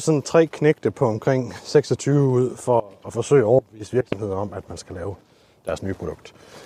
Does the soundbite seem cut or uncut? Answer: uncut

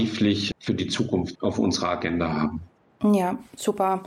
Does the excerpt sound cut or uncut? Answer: cut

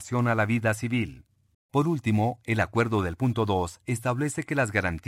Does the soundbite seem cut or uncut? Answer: cut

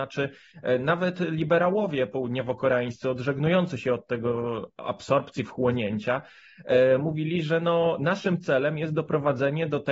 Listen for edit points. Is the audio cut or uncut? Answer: uncut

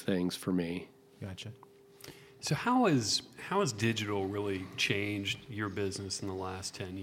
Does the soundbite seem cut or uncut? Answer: uncut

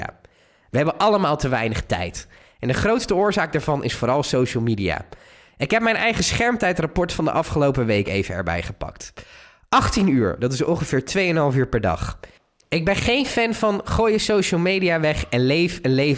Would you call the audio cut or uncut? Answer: uncut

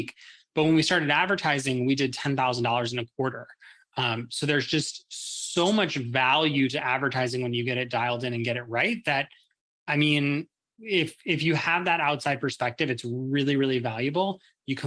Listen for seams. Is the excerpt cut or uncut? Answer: cut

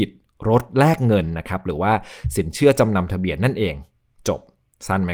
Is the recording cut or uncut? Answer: uncut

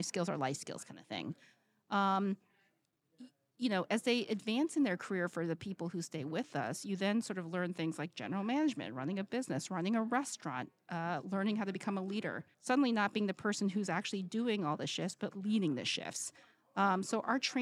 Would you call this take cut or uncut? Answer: cut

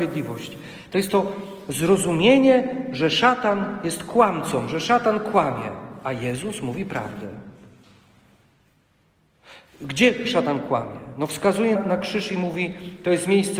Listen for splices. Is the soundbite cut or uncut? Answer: cut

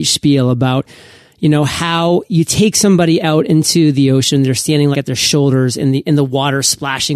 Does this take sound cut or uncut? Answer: cut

